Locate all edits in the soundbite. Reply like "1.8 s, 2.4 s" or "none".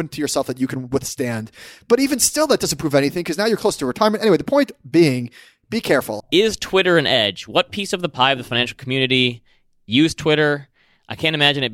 6.2 s